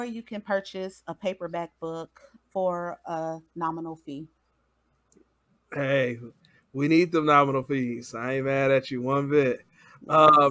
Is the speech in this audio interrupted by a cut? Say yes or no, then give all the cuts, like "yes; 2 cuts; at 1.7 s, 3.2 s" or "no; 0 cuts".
no; 0 cuts